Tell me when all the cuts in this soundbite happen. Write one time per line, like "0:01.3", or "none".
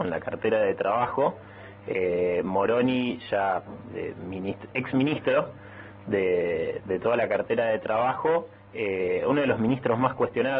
none